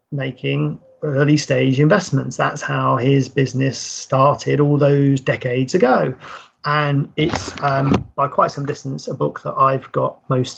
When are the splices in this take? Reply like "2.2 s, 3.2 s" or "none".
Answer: none